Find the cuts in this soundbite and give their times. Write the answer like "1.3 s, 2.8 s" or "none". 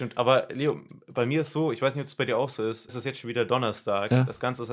2.9 s